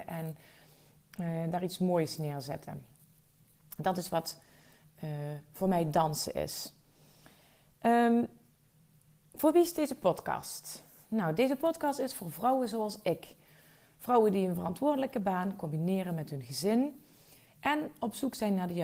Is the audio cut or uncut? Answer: uncut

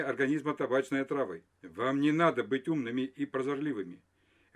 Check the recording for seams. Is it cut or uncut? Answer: cut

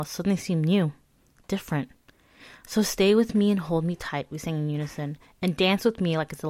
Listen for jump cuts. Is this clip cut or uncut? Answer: uncut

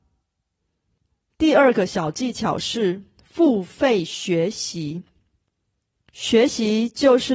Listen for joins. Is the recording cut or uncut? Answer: cut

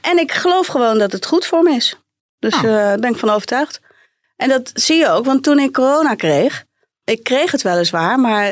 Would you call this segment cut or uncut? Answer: uncut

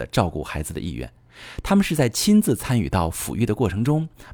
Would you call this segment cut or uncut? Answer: uncut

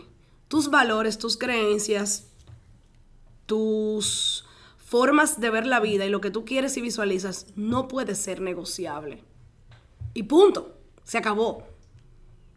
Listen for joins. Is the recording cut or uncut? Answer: uncut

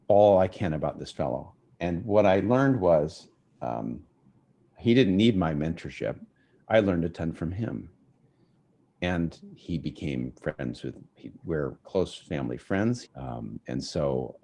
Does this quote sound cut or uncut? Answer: cut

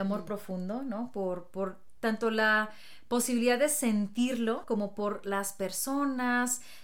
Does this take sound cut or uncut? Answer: cut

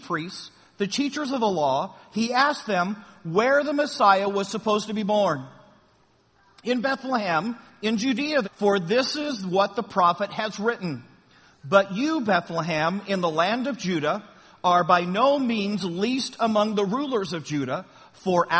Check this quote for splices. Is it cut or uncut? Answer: cut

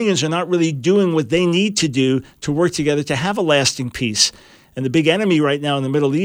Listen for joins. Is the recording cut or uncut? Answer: cut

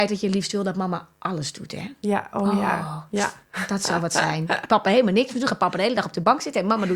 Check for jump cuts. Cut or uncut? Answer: uncut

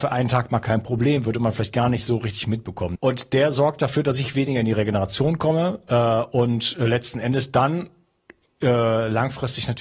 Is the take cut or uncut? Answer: cut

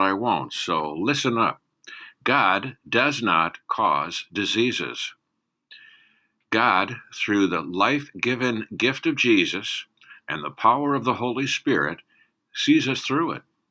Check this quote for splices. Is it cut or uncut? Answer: uncut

